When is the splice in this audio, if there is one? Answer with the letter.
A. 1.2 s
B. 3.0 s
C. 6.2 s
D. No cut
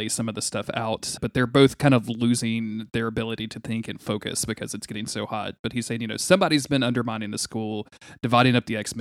A